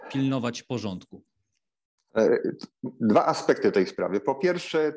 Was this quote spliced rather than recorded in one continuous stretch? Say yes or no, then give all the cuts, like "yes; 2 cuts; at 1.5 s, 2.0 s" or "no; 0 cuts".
no; 0 cuts